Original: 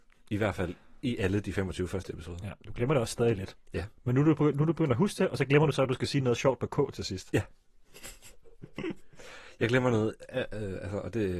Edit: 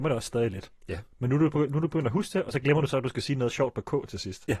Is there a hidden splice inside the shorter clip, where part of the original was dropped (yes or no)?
no